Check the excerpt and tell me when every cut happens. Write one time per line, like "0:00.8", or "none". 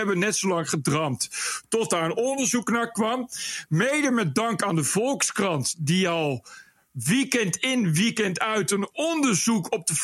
none